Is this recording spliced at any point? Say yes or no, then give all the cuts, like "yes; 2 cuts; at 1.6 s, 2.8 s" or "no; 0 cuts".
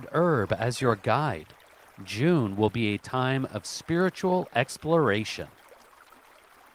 no; 0 cuts